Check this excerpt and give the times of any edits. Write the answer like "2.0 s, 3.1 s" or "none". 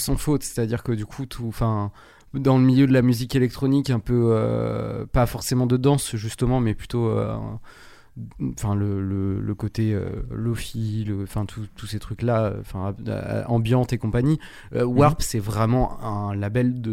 none